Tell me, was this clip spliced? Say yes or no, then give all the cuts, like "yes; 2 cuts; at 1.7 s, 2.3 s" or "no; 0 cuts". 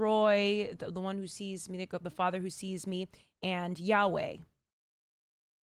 no; 0 cuts